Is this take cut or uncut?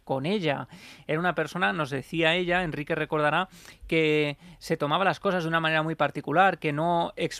uncut